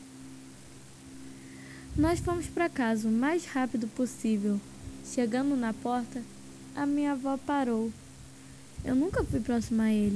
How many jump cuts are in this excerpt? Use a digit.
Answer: 1